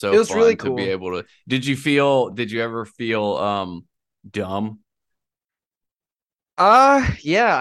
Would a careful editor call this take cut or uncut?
cut